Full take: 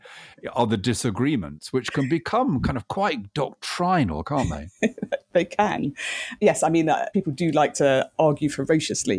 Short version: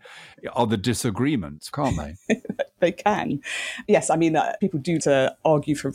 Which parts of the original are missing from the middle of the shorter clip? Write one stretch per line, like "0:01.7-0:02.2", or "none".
0:01.7-0:04.2
0:07.5-0:07.7